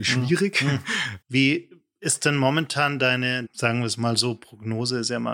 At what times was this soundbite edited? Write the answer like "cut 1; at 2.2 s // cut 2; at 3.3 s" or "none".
cut 1; at 1.2 s // cut 2; at 3.5 s